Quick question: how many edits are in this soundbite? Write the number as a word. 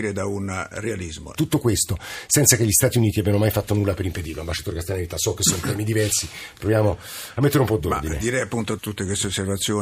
two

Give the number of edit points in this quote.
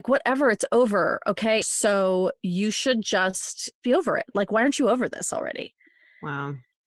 one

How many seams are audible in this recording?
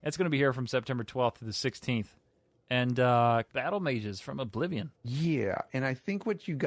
two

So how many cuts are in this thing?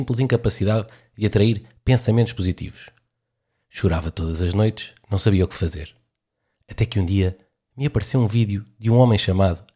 zero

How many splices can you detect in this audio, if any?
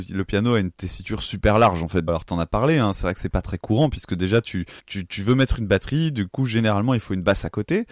two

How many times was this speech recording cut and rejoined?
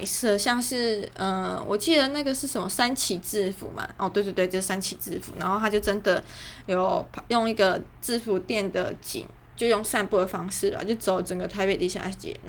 one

